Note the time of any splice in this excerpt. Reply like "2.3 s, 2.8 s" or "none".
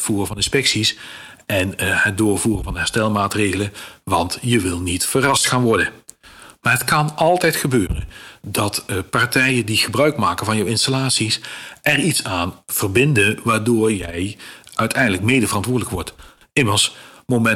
none